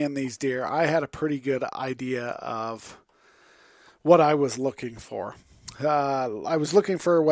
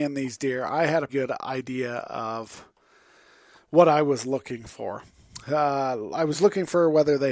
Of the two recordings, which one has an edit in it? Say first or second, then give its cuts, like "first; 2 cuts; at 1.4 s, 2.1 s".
second; 1 cut; at 1.1 s